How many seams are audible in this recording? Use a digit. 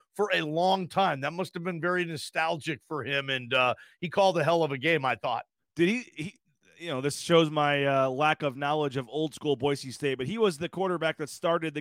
0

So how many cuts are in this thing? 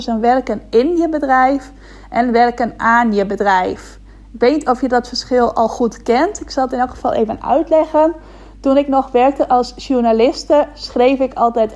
0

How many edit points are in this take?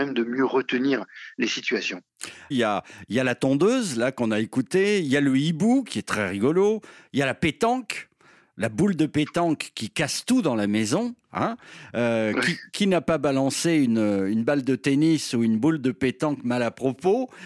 1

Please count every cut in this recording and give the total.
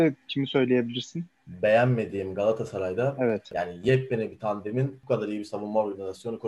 1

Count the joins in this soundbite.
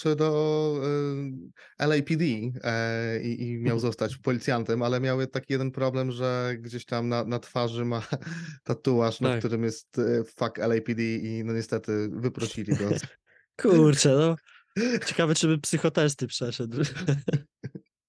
1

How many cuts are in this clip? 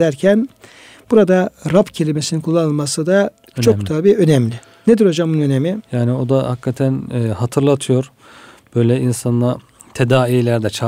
0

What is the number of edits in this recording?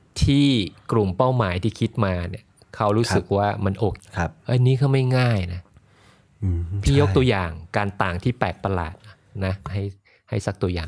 1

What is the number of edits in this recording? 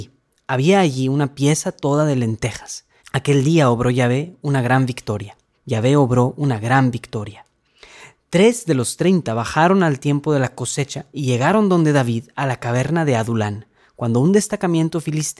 2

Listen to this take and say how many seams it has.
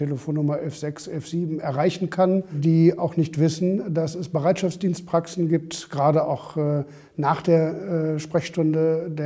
0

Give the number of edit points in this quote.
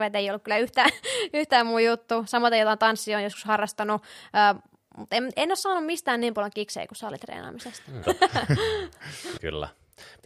2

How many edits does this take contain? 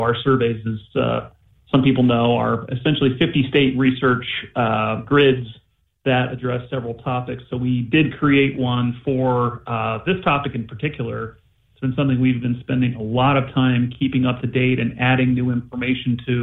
0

